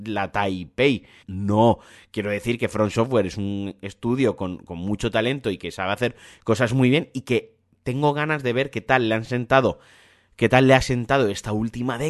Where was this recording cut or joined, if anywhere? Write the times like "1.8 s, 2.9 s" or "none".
1.2 s